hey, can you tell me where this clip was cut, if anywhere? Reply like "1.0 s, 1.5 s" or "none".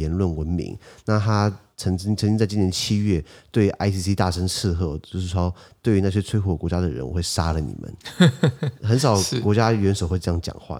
none